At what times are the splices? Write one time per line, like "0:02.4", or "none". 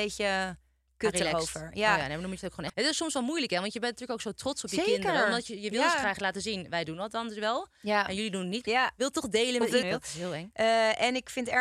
0:02.7
0:08.6
0:09.8